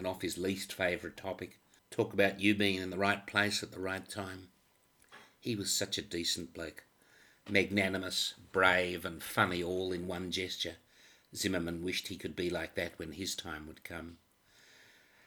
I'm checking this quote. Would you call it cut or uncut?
cut